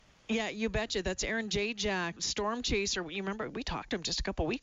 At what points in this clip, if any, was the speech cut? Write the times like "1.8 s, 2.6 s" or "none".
2.2 s